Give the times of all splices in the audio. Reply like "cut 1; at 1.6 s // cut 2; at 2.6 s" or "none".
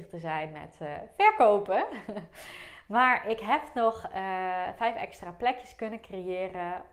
none